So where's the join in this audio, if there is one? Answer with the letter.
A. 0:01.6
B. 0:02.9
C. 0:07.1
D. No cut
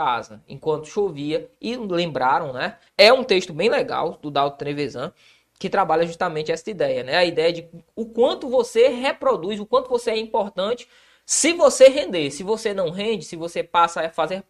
B